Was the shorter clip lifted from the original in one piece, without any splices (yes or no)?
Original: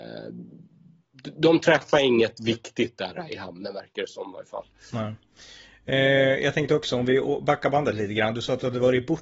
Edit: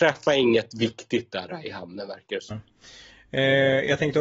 no